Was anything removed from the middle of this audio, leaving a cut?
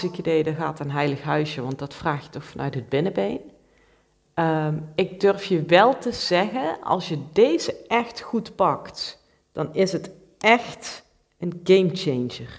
yes; 1 cut; at 4.2 s

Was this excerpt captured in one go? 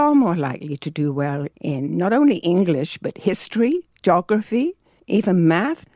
no; 1 cut; at 5.0 s

